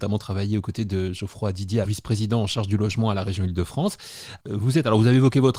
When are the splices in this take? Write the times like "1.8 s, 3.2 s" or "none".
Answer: 1.8 s, 4.4 s